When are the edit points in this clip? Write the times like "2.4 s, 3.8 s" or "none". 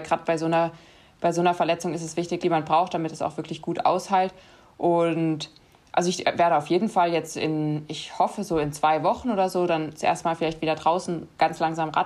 2.4 s